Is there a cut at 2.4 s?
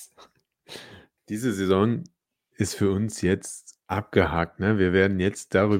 no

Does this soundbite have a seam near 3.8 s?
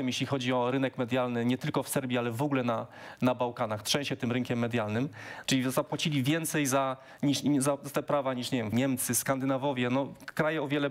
no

